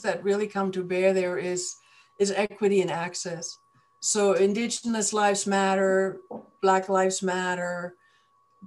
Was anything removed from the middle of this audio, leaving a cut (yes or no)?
no